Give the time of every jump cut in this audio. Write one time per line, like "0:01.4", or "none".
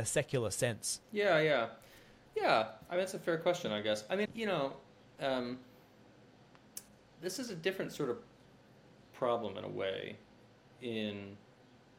0:01.0
0:04.3